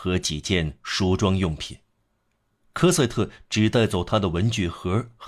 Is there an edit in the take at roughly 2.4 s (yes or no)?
no